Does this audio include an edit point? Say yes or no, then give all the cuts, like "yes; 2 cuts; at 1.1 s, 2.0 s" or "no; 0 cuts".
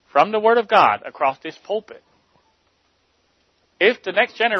yes; 1 cut; at 3.6 s